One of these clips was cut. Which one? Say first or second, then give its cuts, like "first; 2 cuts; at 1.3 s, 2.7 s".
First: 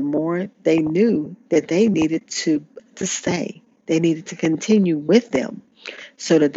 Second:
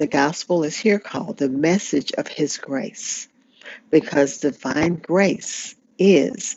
first; 1 cut; at 2.8 s